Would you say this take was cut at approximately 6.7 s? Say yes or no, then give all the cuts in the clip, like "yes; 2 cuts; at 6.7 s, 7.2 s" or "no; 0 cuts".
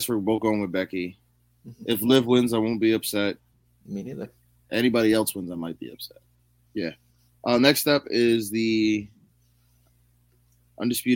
yes; 1 cut; at 6.7 s